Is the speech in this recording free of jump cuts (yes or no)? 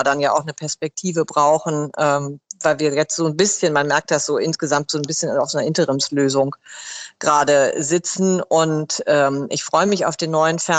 yes